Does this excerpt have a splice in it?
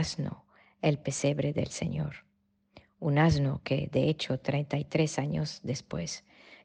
no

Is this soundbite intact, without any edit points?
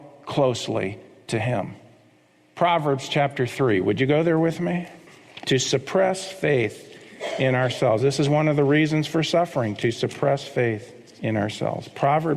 yes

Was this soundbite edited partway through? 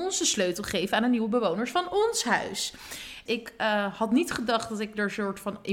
yes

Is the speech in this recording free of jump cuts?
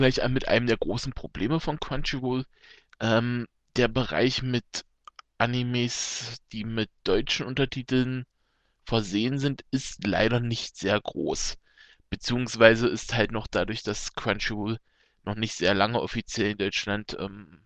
yes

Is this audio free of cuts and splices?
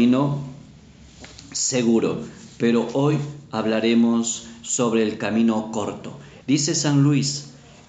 no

